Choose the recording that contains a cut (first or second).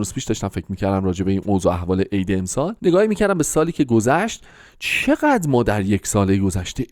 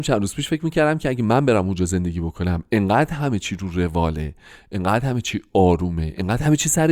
first